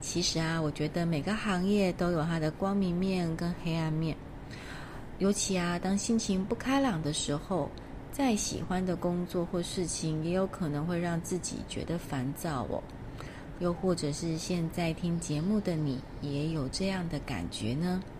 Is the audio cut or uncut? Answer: cut